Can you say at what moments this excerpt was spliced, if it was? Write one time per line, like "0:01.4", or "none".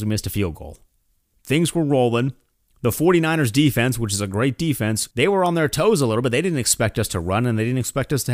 0:01.3
0:05.1